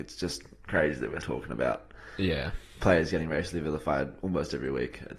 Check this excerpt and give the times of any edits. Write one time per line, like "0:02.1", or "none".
0:01.2